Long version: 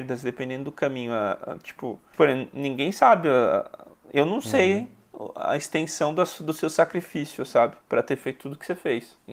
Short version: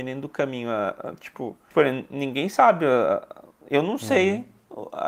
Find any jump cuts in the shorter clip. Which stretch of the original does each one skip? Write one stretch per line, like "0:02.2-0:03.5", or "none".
none